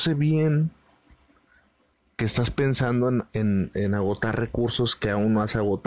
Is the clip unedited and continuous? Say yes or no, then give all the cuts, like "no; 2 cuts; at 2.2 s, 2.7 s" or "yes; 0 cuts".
yes; 0 cuts